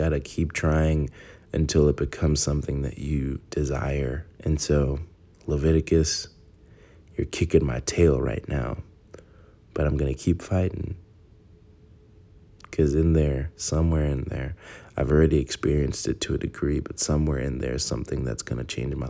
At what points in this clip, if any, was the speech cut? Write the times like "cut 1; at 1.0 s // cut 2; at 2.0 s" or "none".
cut 1; at 4.3 s